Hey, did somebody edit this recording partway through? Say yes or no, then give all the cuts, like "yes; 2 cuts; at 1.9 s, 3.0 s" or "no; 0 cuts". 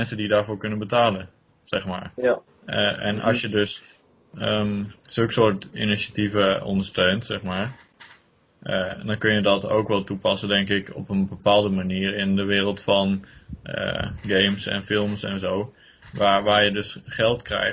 yes; 2 cuts; at 2.5 s, 5.0 s